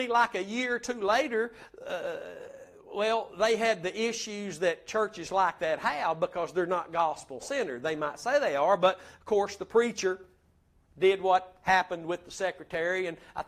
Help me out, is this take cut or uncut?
uncut